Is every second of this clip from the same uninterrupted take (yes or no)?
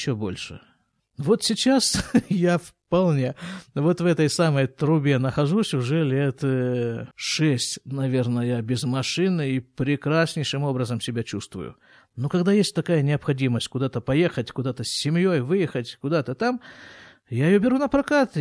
no